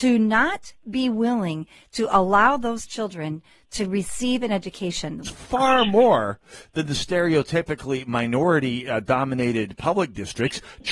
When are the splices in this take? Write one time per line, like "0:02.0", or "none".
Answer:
0:05.2